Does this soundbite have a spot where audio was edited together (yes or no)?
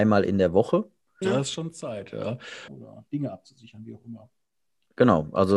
yes